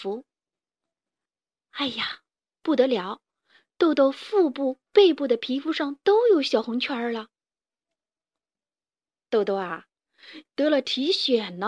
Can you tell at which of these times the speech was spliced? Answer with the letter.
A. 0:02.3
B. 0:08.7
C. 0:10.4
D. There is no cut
C